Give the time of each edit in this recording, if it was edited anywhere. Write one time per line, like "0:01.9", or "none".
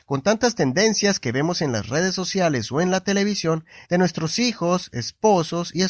0:03.8